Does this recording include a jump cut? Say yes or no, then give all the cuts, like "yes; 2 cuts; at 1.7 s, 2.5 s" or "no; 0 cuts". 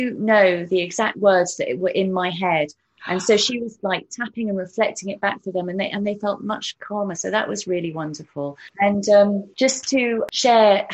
yes; 1 cut; at 3.8 s